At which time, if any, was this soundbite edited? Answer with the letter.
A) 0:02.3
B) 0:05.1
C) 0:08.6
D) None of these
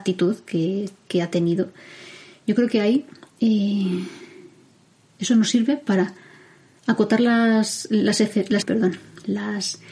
C